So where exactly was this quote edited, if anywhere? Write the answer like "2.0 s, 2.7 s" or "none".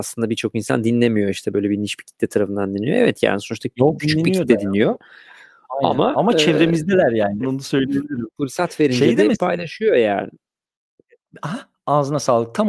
4.0 s, 7.4 s